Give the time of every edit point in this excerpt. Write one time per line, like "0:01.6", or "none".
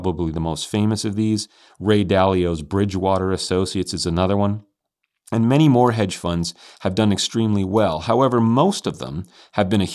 none